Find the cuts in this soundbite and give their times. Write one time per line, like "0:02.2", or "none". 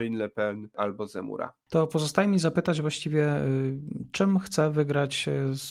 0:01.6